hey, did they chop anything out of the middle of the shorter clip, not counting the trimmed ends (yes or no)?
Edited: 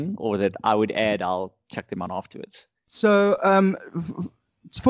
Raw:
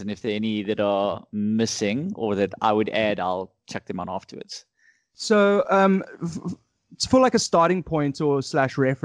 yes